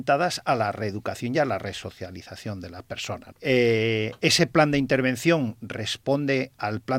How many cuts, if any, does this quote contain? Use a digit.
1